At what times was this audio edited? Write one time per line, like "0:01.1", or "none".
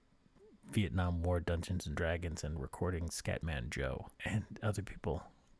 0:04.1